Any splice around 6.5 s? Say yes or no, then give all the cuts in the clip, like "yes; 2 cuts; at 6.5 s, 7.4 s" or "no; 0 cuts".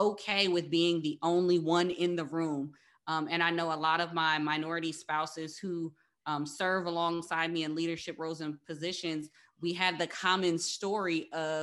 no; 0 cuts